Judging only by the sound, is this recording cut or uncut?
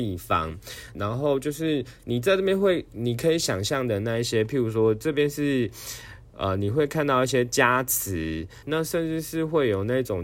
cut